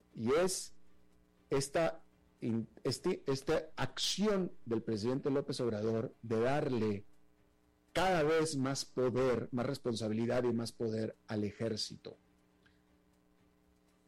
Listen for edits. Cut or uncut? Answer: uncut